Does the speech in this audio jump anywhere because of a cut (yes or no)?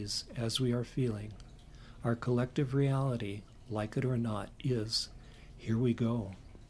no